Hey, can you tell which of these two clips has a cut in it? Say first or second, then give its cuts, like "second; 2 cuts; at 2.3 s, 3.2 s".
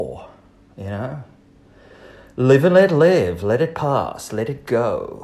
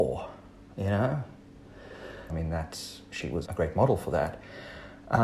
second; 2 cuts; at 2.3 s, 3.4 s